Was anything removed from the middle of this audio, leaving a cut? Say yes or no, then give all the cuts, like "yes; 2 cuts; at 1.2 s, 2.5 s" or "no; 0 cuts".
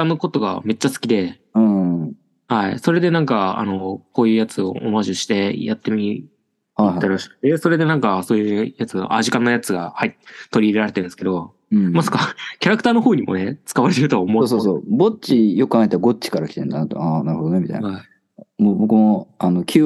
yes; 1 cut; at 6.8 s